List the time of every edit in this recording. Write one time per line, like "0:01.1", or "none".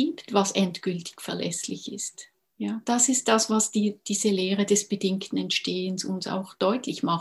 none